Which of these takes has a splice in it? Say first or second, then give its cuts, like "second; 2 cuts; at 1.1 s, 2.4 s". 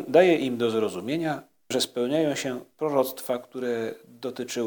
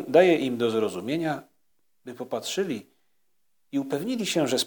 first; 1 cut; at 1.7 s